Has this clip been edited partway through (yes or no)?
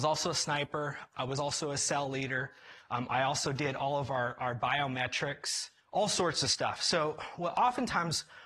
no